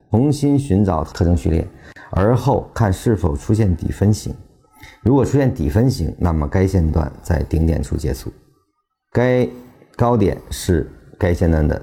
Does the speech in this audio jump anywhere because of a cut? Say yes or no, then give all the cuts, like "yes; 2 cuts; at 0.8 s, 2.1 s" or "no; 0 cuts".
no; 0 cuts